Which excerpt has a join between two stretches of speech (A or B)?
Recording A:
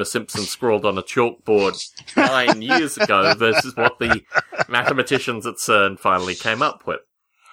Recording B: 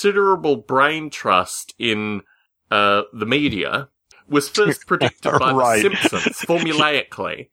B